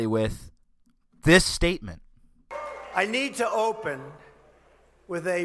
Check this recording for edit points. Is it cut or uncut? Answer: uncut